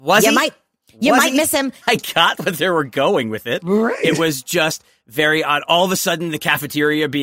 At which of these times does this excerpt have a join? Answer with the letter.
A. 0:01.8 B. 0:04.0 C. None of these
A